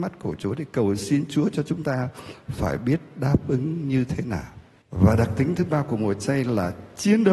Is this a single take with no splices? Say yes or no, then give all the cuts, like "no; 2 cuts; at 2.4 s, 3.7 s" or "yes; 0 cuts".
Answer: no; 1 cut; at 4.8 s